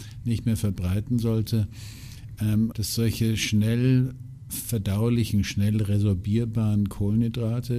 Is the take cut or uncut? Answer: cut